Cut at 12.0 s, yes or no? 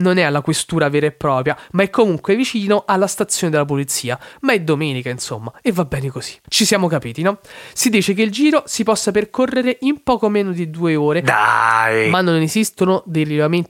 no